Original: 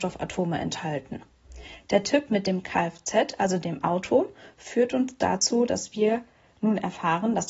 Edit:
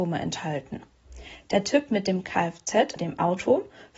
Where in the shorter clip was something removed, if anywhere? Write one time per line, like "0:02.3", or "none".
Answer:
0:03.0